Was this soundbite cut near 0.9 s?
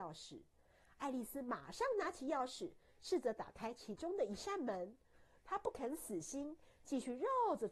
no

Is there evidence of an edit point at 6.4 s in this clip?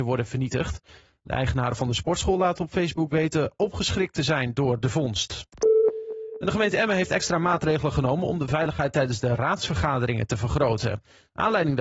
no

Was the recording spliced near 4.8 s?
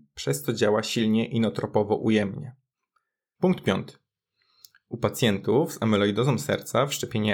no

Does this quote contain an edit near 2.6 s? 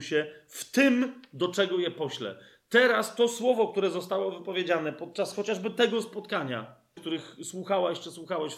no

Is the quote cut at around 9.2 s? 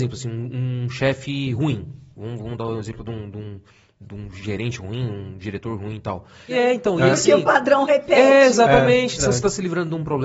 yes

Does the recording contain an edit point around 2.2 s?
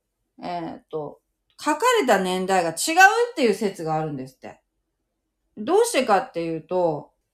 no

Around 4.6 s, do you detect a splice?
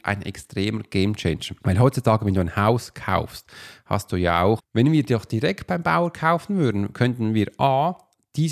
yes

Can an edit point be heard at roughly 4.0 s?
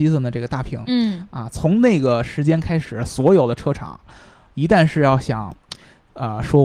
no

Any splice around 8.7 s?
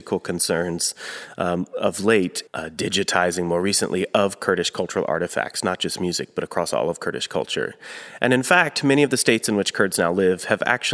no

